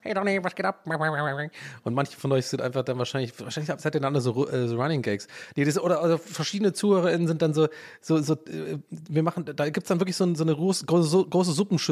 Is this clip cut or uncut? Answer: uncut